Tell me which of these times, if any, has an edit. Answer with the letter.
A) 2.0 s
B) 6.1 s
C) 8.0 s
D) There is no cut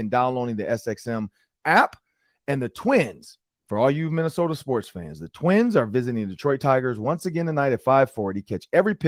D